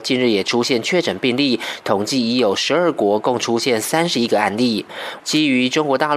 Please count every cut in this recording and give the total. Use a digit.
1